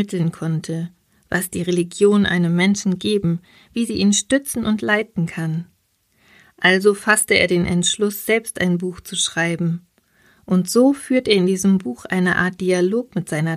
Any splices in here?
yes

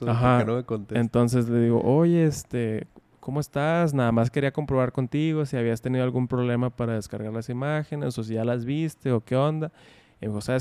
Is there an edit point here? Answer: no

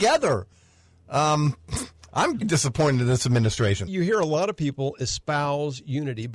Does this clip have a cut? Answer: yes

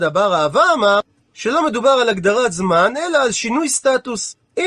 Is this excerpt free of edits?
yes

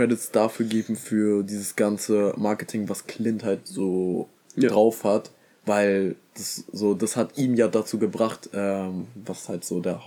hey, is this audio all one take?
yes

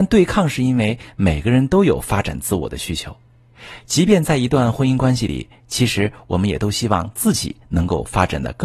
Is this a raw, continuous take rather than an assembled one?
yes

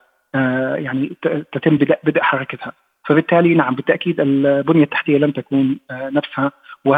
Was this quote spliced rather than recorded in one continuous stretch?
no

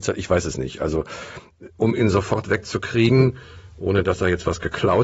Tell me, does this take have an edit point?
no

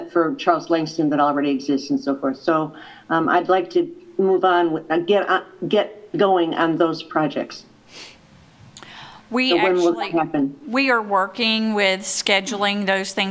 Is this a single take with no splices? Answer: yes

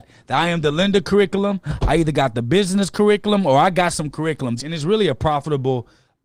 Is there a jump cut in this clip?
yes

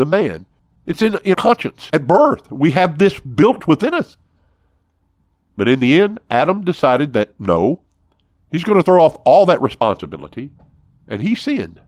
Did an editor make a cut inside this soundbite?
no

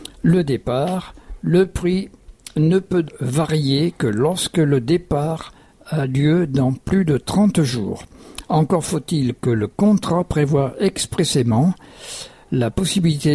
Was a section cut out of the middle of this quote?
yes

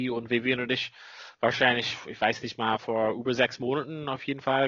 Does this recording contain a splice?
no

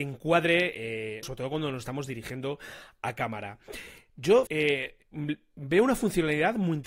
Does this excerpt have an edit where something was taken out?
yes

